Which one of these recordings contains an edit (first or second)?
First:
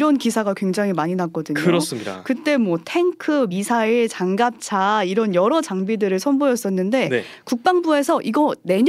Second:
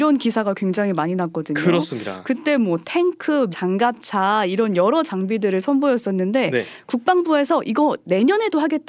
second